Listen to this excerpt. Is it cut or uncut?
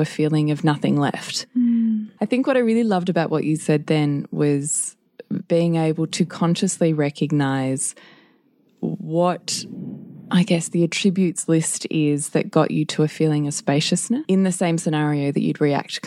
cut